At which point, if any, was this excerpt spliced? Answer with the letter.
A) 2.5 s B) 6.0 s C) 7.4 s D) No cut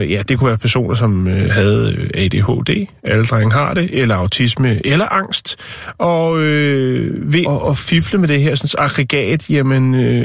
C